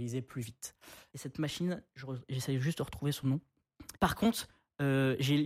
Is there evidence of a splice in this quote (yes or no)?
yes